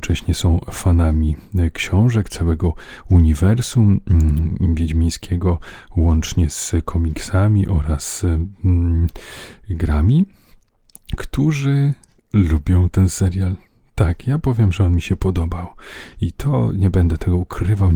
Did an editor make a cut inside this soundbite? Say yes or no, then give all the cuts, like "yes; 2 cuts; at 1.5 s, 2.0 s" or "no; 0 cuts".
no; 0 cuts